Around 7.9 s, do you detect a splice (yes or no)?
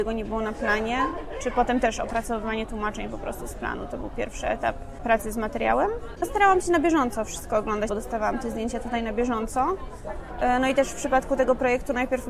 yes